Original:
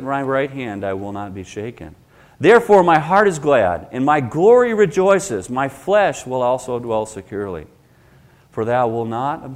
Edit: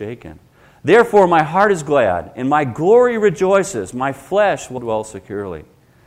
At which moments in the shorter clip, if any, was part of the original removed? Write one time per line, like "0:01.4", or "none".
0:04.8